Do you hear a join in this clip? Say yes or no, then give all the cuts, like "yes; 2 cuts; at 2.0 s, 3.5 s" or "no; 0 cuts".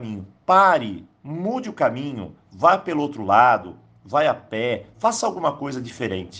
no; 0 cuts